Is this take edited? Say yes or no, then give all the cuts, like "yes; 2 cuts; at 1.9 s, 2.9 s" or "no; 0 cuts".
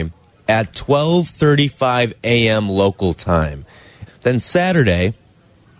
yes; 1 cut; at 4.1 s